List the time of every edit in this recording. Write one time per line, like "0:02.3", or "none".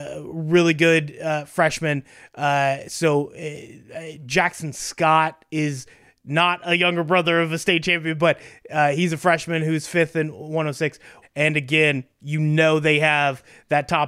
0:11.2